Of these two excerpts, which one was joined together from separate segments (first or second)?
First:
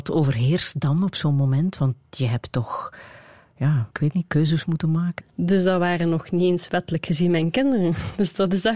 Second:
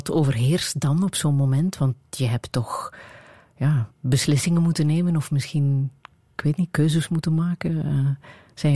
first